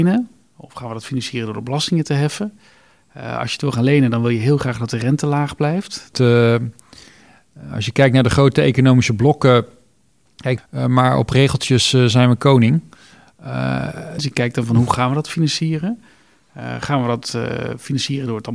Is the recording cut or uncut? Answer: cut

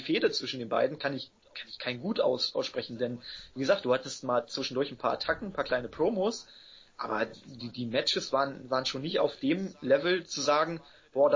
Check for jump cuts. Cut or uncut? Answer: uncut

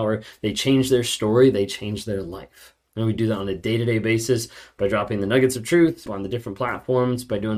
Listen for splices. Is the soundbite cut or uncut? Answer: cut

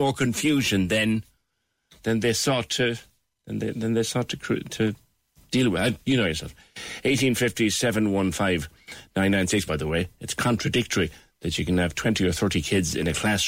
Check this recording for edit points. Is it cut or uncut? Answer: cut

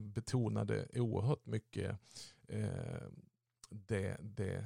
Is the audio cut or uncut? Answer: uncut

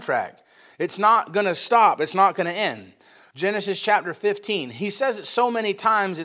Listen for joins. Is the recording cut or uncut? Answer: uncut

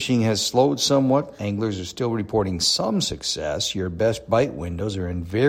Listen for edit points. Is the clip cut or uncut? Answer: uncut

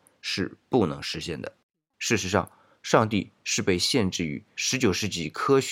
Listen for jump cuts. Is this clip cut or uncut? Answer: cut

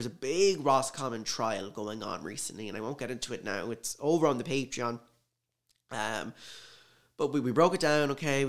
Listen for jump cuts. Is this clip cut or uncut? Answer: uncut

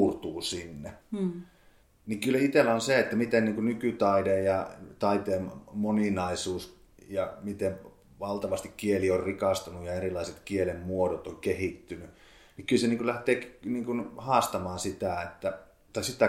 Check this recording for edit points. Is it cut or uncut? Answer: cut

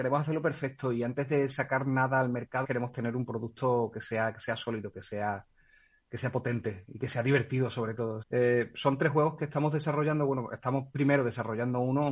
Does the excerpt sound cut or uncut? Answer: cut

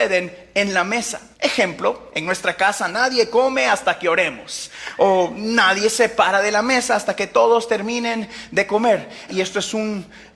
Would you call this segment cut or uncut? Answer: cut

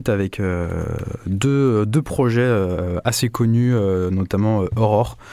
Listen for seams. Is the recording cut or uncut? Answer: uncut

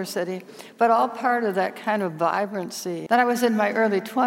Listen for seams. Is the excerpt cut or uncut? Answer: cut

